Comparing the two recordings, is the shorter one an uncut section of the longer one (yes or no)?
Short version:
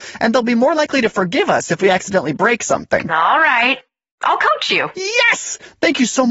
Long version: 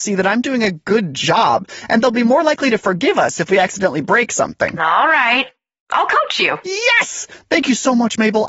yes